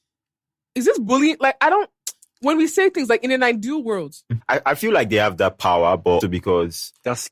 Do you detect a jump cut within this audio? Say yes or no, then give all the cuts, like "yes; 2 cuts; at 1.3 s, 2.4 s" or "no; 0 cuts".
yes; 2 cuts; at 4.4 s, 6.2 s